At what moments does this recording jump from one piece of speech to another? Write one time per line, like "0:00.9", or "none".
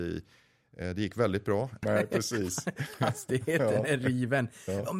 0:01.8